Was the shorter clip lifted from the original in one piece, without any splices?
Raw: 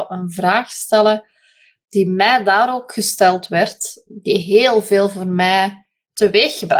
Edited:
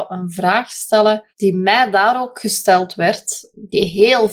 no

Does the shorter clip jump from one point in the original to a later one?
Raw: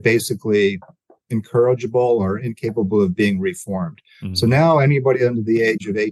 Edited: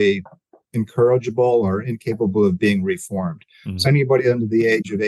yes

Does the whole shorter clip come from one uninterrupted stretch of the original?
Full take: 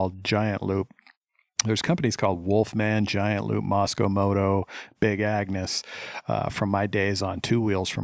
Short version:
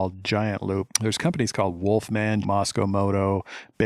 no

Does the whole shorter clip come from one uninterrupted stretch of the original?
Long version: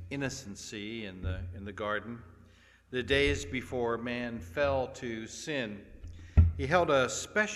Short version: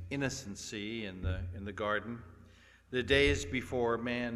yes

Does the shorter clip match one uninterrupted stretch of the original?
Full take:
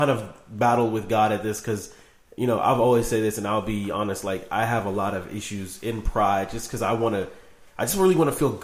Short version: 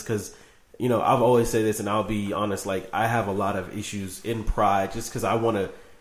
yes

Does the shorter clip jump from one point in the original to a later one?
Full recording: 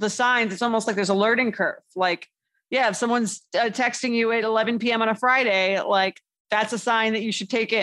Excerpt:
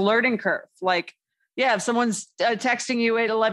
no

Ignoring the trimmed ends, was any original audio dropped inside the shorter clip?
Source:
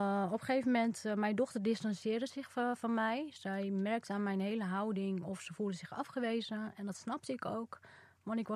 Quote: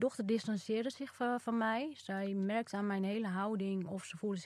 no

